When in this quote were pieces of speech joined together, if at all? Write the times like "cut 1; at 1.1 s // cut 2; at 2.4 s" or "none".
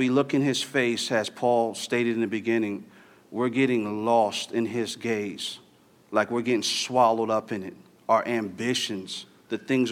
none